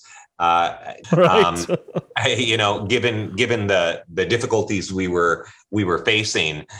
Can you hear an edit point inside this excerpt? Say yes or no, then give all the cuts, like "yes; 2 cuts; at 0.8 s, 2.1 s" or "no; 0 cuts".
yes; 1 cut; at 1.0 s